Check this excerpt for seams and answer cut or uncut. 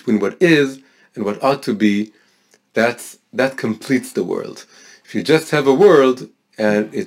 uncut